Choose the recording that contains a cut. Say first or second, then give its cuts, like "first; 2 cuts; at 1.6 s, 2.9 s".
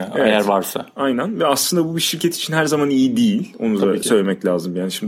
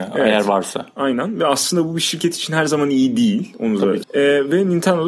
second; 1 cut; at 4.0 s